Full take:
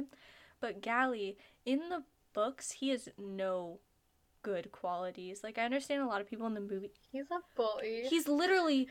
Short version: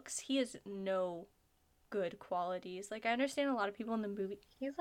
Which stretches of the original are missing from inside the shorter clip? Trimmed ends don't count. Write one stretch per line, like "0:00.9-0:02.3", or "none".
none